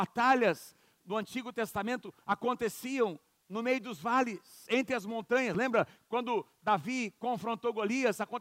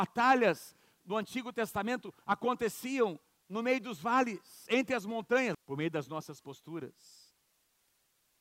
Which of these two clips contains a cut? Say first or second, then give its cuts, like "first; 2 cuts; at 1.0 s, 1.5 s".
second; 1 cut; at 5.5 s